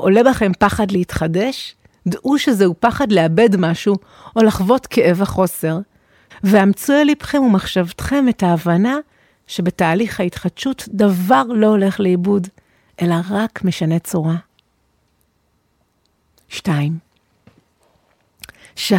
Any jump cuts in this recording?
yes; 1 cut; at 6.3 s

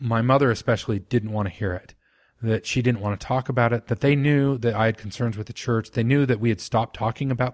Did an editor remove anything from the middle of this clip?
no; 0 cuts

